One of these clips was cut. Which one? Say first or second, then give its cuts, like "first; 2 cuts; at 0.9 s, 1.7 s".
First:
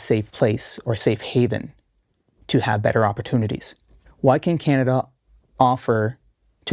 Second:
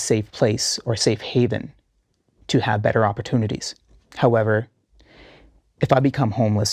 first; 1 cut; at 4.1 s